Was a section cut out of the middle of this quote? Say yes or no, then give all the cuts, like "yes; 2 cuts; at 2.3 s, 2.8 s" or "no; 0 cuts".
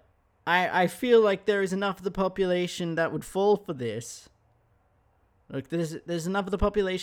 no; 0 cuts